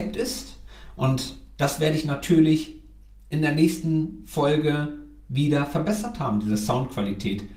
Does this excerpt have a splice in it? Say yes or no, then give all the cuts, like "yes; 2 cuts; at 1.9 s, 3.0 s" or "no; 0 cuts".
no; 0 cuts